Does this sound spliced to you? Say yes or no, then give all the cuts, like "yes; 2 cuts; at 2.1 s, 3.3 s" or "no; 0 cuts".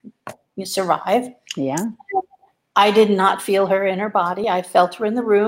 no; 0 cuts